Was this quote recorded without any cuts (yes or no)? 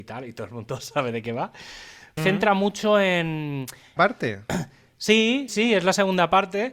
no